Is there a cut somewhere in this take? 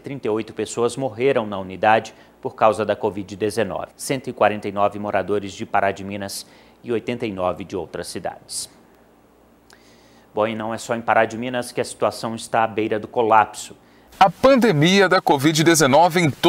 yes; 2 cuts; at 3.9 s, 14.1 s

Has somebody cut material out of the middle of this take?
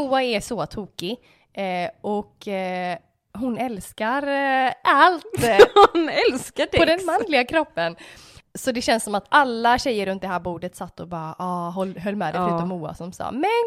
no; 0 cuts

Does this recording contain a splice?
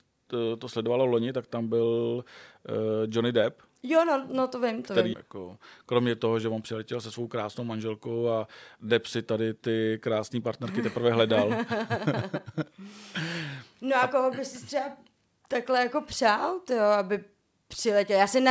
yes; 1 cut; at 5.1 s

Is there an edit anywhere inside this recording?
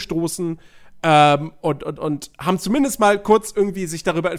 no; 0 cuts

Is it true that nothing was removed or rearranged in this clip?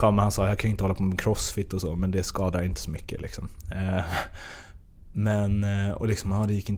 yes; 0 cuts

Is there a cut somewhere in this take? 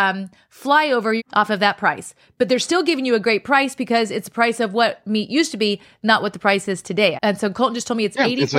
yes; 2 cuts; at 1.2 s, 7.1 s

